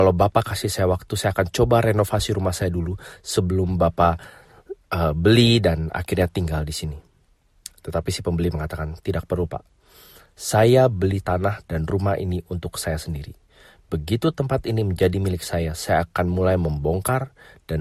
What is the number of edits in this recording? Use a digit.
0